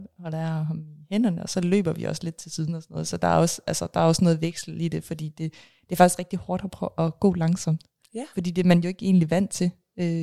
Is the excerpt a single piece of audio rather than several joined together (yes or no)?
yes